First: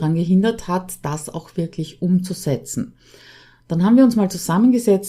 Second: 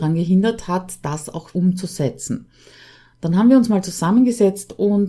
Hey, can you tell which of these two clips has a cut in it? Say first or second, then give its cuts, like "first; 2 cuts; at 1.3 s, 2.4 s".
second; 1 cut; at 1.5 s